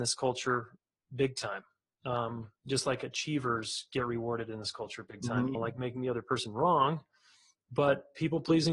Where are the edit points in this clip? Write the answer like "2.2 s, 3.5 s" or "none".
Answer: 5.6 s